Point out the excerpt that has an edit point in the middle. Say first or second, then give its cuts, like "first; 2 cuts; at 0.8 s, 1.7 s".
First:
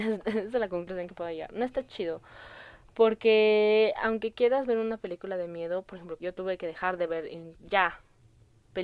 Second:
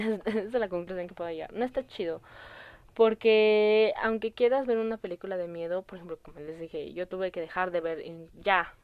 first; 1 cut; at 6.2 s